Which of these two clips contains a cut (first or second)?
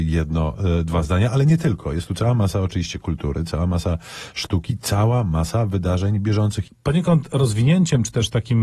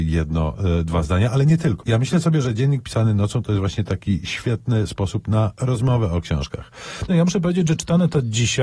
second